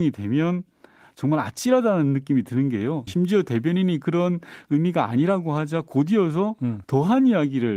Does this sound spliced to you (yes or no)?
yes